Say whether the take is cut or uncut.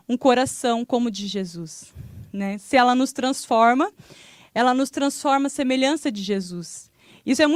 uncut